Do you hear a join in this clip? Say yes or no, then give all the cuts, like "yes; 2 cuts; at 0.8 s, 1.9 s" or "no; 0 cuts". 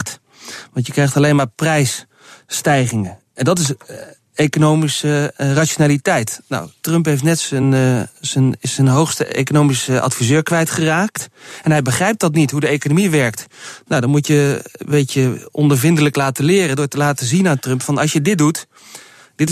no; 0 cuts